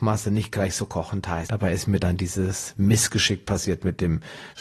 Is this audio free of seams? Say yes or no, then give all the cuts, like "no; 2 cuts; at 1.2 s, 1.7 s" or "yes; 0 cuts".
no; 1 cut; at 1.5 s